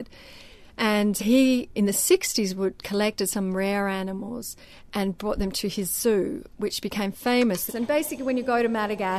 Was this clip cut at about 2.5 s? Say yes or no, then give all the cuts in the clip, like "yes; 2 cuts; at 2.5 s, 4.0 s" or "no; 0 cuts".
no; 2 cuts; at 1.2 s, 7.7 s